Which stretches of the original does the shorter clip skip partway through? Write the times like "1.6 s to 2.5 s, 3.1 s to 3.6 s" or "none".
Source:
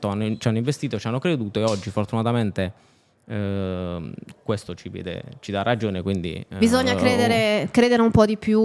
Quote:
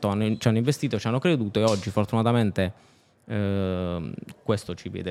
none

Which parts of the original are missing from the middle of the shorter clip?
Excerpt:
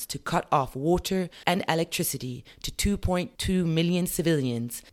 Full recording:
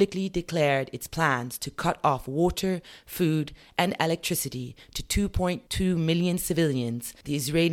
3.0 s to 3.7 s

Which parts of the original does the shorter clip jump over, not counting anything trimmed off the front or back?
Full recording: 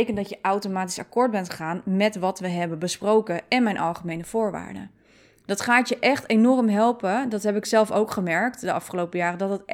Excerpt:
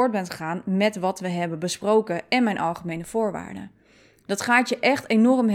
none

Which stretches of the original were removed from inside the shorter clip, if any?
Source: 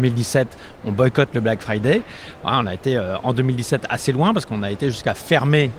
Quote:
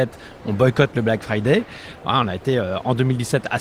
none

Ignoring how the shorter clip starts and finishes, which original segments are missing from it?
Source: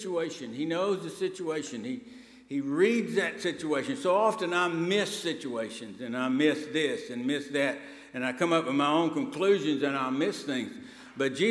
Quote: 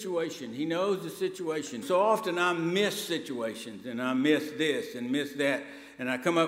1.8 s to 4.0 s

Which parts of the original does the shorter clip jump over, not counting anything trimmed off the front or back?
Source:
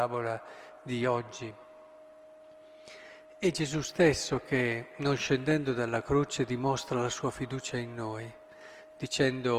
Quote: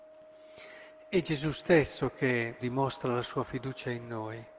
4.9 s to 6.5 s

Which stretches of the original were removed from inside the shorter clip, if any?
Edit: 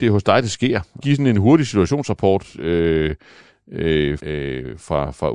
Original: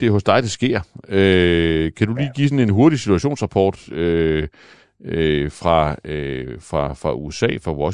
1.0 s to 2.3 s, 5.5 s to 6.0 s

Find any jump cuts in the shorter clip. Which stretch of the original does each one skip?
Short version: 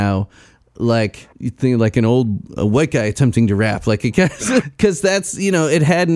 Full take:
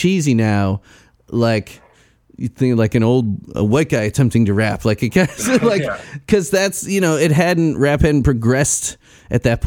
1.8 s to 2.3 s, 5.6 s to 6.1 s

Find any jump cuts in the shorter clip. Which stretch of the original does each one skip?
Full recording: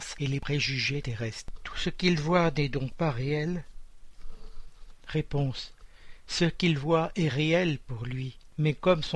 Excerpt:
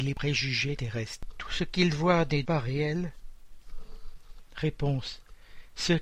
2.7 s to 3.0 s

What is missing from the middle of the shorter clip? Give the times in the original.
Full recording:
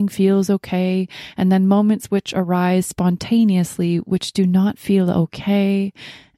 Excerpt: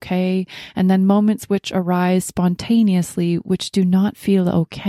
none

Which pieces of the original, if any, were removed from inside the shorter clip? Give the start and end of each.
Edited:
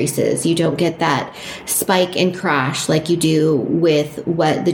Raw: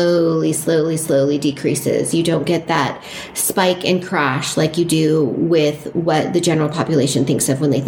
none

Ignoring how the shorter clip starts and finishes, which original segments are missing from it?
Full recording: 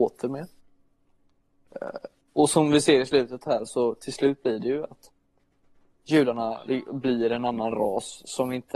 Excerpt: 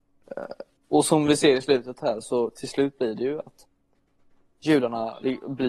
none

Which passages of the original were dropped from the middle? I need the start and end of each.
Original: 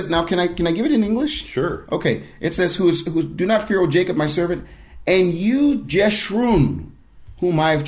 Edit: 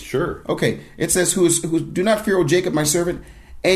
none

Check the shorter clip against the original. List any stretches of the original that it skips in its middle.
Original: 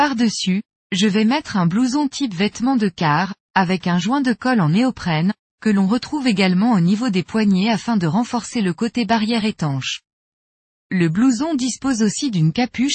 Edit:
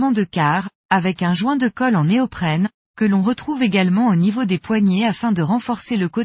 none

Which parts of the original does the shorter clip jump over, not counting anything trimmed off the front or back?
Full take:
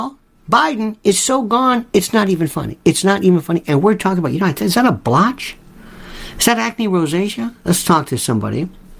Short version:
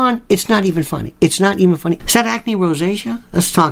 3.6 s to 6.3 s

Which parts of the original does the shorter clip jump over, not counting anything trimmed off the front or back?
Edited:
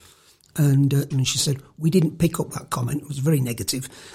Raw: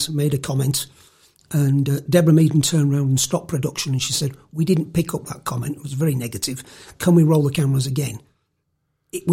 2.1 s to 3.8 s

